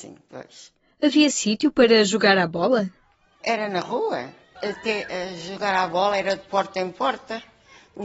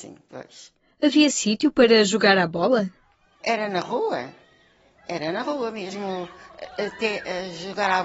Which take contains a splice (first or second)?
first